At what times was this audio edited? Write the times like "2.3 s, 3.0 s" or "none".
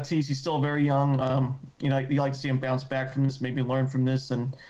none